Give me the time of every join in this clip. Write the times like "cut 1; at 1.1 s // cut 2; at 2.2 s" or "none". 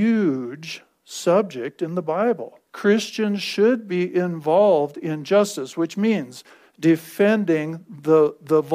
cut 1; at 2.7 s